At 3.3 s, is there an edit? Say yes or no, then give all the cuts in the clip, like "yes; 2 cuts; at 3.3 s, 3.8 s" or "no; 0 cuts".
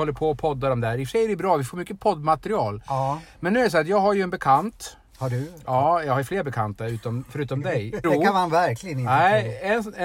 no; 1 cut; at 8.0 s